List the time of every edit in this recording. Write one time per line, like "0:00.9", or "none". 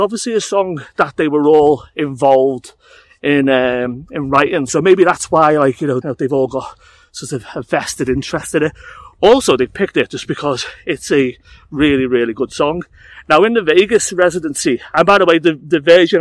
0:06.0